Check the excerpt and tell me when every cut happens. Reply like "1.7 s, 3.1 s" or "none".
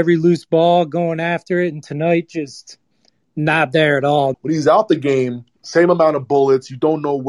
4.3 s, 5.6 s